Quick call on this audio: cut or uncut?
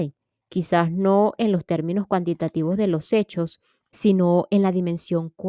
cut